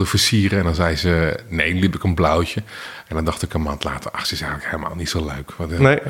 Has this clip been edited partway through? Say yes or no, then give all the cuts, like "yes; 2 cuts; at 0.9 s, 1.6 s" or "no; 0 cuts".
no; 0 cuts